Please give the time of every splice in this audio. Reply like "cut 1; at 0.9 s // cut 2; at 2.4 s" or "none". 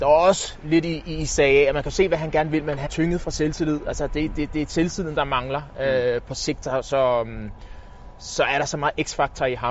cut 1; at 2.9 s